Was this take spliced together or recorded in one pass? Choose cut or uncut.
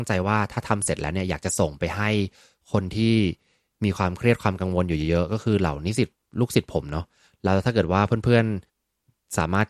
cut